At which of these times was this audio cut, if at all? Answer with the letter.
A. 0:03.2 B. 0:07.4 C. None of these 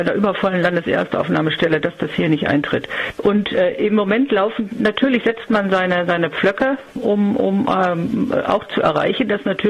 A